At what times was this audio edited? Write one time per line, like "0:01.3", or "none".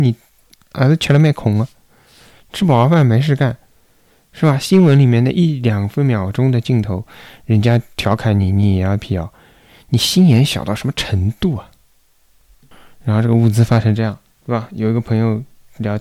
none